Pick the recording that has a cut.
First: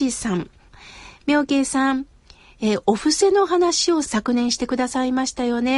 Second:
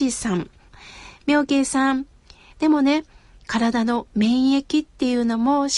second; 1 cut; at 2.5 s

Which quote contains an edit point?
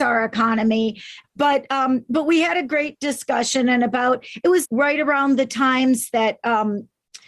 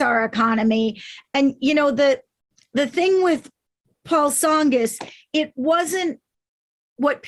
first; 2 cuts; at 1.2 s, 4.6 s

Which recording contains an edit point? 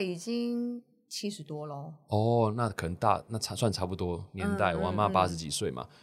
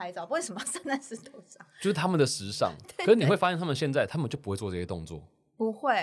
second; 1 cut; at 2.8 s

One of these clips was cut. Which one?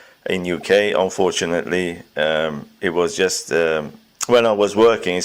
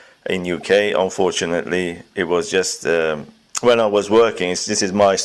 second; 1 cut; at 2.1 s

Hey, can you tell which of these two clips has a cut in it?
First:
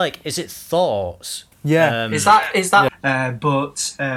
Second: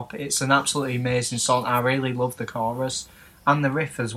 first; 2 cuts; at 1.5 s, 2.9 s

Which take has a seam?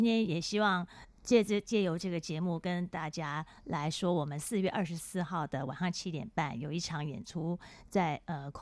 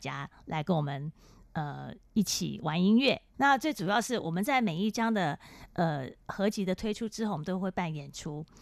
second; 1 cut; at 3.3 s

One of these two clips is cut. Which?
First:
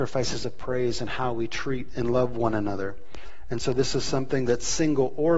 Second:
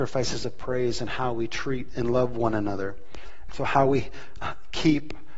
second; 1 cut; at 3.5 s

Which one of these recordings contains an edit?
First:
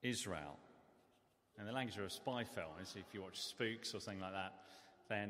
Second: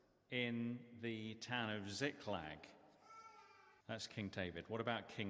second; 1 cut; at 3.8 s

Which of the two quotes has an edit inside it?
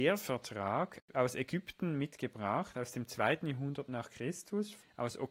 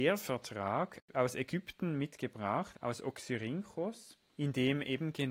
second; 1 cut; at 2.7 s

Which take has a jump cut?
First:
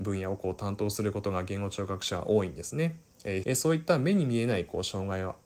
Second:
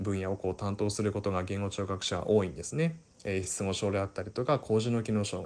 first; 1 cut; at 3.4 s

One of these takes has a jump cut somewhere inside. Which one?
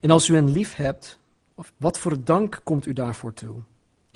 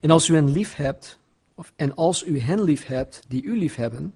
first; 1 cut; at 1.7 s

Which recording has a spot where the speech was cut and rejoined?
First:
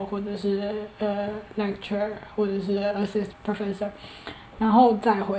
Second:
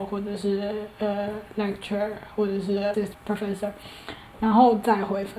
second; 1 cut; at 2.9 s

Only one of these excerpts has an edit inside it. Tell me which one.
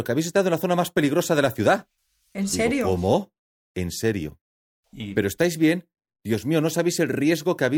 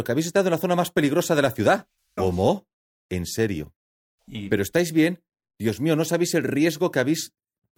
second; 1 cut; at 2.2 s

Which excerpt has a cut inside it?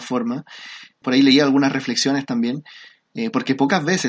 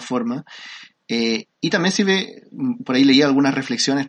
first; 2 cuts; at 1.0 s, 3.1 s

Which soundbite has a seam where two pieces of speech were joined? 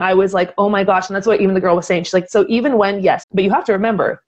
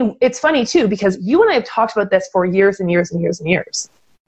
first; 1 cut; at 3.2 s

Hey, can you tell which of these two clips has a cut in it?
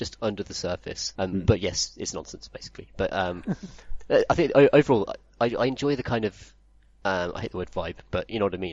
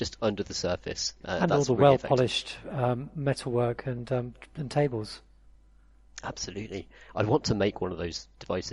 first; 1 cut; at 1.2 s

